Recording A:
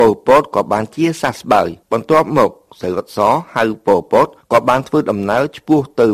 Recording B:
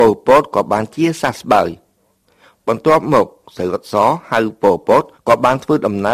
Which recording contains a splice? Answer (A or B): A